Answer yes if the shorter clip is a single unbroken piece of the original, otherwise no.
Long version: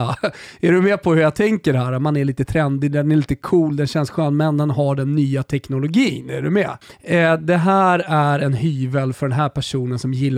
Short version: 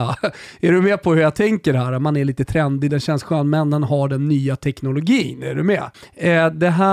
no